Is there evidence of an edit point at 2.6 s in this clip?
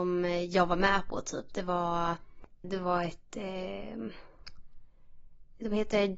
yes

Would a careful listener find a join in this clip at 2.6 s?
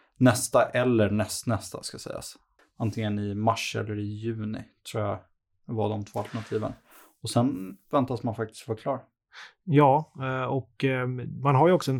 yes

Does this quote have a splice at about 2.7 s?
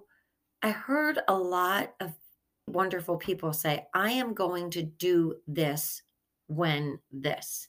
yes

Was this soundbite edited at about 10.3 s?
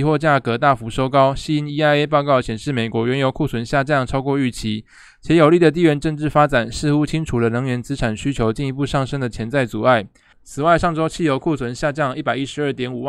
yes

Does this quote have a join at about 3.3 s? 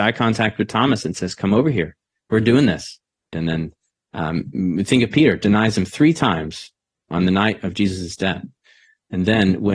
yes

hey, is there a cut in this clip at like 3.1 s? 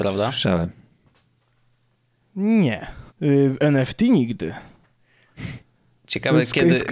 yes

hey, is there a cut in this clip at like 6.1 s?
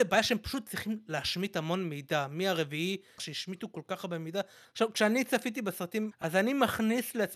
yes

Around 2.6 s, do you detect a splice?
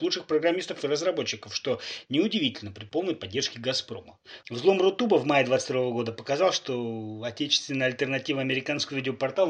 no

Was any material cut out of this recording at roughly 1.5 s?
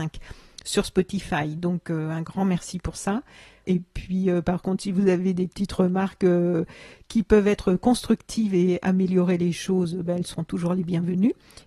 no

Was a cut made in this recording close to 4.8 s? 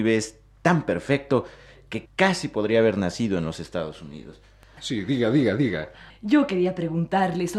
yes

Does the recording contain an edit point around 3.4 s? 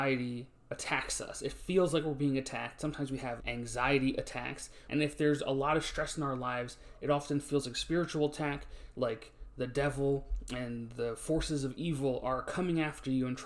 yes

